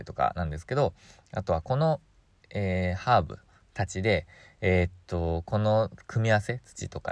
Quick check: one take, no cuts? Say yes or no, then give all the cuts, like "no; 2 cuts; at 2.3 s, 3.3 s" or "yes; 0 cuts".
yes; 0 cuts